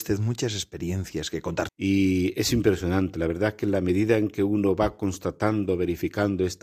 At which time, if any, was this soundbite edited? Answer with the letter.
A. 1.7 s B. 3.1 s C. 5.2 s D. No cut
A